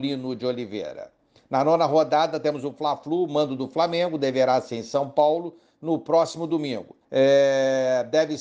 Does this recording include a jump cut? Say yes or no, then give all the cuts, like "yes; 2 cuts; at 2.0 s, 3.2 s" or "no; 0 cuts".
yes; 1 cut; at 7.0 s